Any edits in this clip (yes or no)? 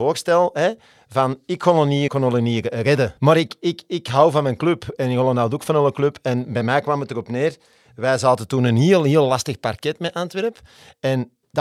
yes